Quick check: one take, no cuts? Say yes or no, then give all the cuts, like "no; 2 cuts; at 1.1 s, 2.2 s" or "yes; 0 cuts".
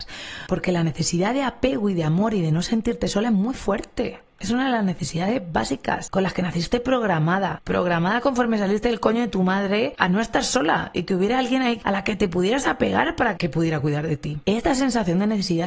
no; 1 cut; at 13.3 s